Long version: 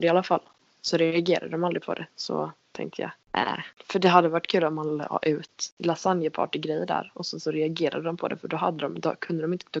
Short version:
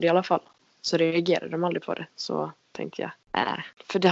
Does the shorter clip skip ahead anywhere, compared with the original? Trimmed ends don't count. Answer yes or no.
no